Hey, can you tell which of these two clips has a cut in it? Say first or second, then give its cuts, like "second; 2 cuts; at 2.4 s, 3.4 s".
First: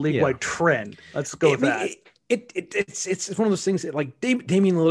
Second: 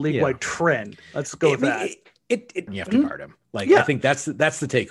second; 1 cut; at 2.7 s